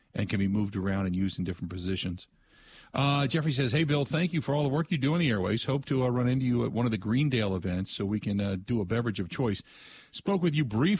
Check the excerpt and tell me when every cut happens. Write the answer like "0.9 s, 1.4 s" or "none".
none